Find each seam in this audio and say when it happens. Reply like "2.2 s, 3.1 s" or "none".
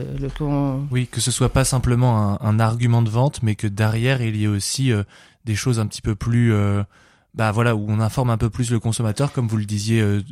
none

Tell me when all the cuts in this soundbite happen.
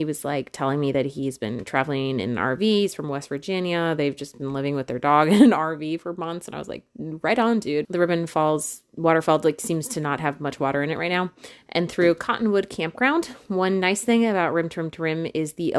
7.8 s

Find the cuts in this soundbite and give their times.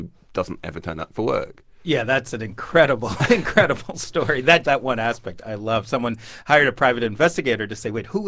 4.6 s

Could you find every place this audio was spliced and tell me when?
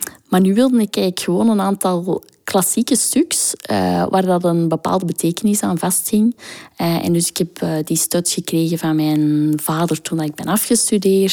none

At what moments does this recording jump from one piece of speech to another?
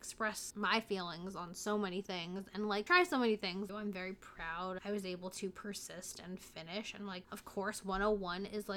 3.7 s

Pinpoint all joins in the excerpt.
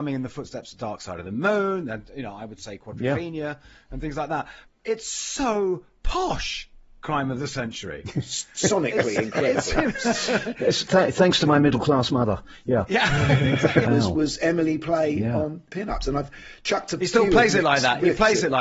13.8 s

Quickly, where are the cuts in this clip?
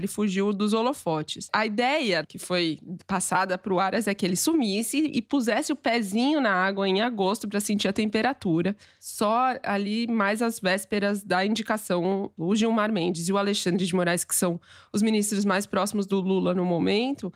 12.4 s

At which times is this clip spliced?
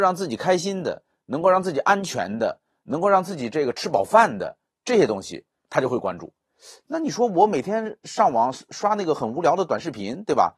none

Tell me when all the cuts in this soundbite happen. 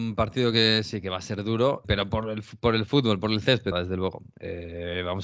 1.8 s, 3.7 s

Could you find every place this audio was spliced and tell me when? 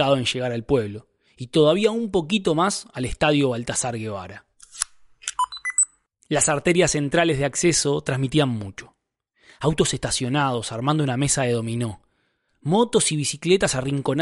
none

